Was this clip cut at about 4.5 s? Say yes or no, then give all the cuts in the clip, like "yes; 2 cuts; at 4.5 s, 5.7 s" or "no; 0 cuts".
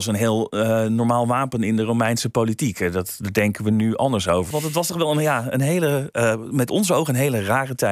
yes; 1 cut; at 4.5 s